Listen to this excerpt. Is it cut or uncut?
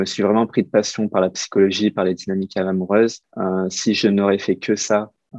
uncut